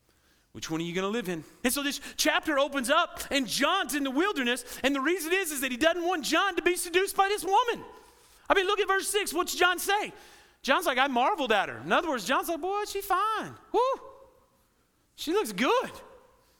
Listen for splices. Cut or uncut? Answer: cut